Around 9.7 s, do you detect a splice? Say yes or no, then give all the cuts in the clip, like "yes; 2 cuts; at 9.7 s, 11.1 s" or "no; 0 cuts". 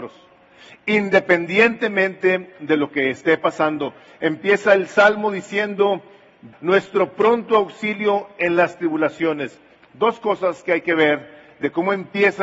no; 1 cut; at 6.5 s